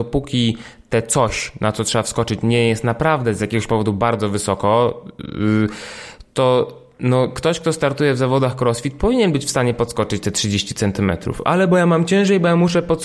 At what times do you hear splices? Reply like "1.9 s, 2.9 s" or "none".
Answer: none